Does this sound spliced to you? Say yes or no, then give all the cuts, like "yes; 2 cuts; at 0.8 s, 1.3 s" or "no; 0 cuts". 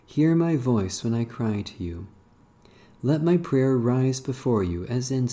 no; 0 cuts